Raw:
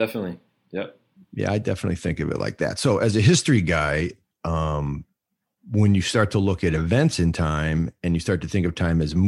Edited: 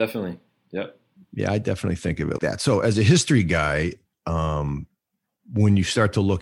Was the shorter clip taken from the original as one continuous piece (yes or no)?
no